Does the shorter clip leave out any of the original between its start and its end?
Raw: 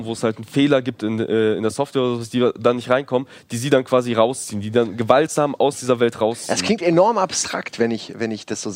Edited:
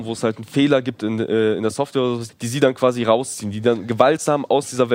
yes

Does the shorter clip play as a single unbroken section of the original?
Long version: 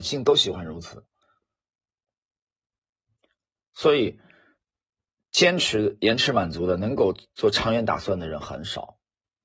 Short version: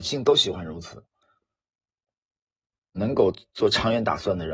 no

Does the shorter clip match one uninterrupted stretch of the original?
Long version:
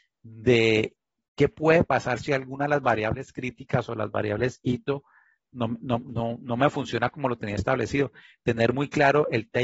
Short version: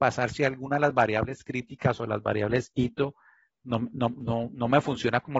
yes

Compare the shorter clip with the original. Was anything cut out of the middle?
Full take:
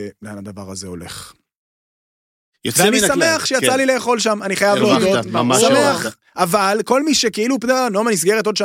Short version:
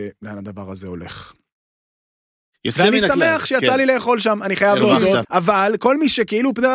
yes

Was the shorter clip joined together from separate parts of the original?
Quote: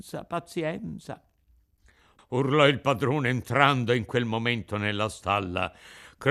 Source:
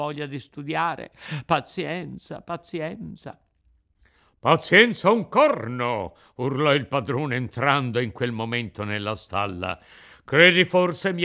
yes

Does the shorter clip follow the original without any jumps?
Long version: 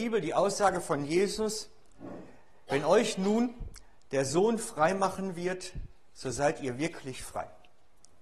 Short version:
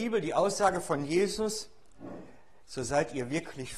no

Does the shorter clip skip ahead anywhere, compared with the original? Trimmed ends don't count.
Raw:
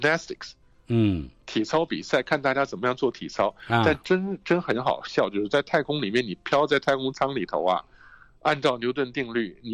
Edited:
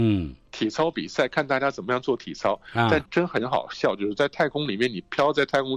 yes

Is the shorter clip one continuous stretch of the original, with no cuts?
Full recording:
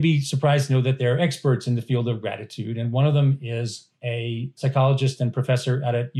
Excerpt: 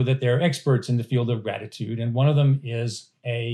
yes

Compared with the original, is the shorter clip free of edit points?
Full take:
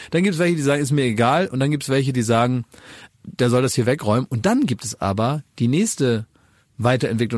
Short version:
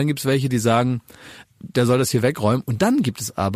yes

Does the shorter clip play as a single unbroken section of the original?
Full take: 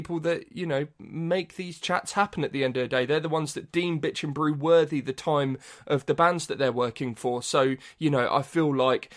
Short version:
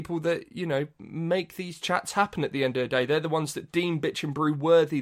yes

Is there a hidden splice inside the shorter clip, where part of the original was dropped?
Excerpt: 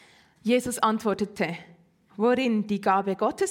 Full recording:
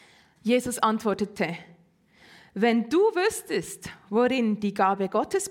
yes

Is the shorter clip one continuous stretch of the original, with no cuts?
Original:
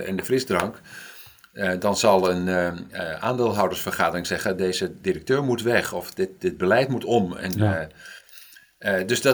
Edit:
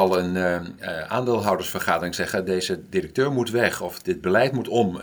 no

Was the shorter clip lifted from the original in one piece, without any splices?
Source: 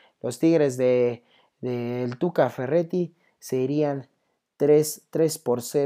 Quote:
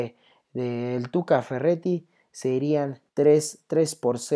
no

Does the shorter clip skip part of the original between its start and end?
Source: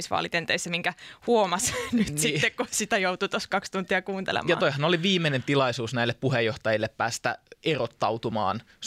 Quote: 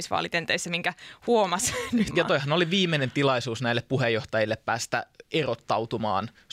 yes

